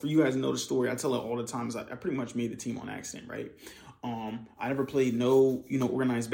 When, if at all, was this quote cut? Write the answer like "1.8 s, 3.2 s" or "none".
none